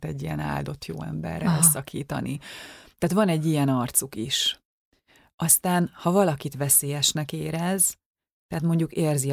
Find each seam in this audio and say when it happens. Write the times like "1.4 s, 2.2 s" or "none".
none